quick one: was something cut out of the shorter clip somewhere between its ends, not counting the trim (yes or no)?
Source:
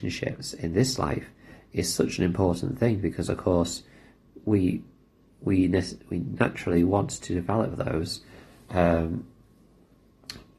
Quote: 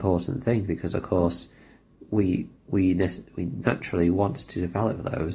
yes